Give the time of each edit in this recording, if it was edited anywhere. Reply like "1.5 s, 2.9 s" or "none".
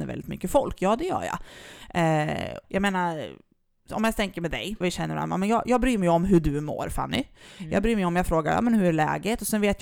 2.6 s, 4.8 s